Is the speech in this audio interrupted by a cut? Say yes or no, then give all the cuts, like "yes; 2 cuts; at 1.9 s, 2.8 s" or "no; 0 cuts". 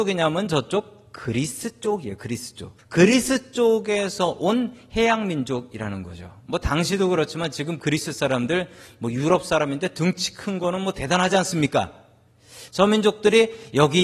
yes; 2 cuts; at 2.8 s, 12.7 s